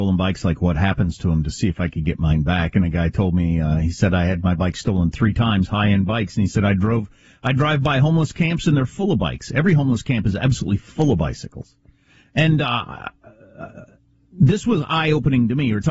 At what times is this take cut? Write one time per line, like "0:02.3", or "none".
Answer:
none